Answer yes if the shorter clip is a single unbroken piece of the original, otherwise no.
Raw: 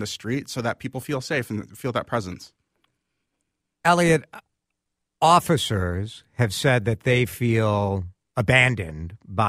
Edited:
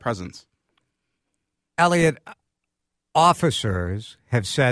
yes